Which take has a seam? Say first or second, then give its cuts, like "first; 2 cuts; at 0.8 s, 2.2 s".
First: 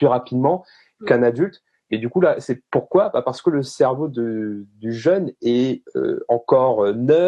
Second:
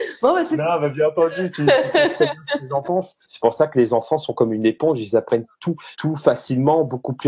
second; 2 cuts; at 3.2 s, 5.9 s